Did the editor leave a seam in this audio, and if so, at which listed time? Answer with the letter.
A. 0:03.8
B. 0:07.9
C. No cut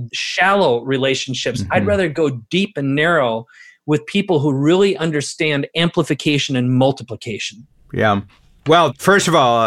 C